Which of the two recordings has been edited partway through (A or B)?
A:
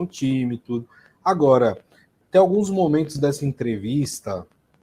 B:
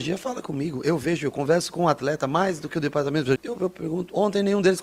B